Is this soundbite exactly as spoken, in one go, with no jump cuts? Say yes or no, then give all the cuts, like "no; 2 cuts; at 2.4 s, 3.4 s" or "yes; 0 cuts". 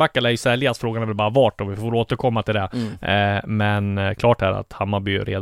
yes; 0 cuts